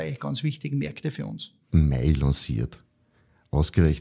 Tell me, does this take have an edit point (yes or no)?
yes